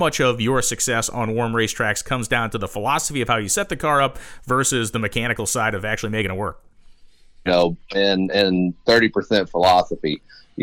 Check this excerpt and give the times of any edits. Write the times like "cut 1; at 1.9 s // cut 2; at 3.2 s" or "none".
cut 1; at 7.5 s

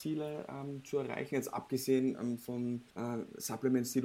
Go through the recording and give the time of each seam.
cut 1; at 2.9 s

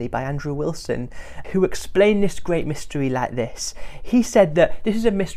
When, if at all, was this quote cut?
cut 1; at 1.4 s

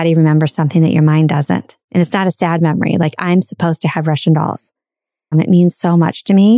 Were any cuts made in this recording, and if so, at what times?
cut 1; at 1.8 s // cut 2; at 5.3 s

